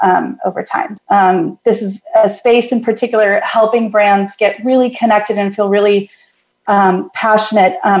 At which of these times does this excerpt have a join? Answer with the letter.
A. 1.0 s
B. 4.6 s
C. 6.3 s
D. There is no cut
A